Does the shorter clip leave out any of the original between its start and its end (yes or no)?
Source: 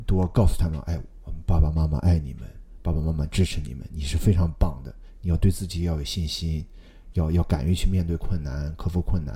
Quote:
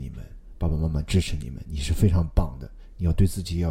no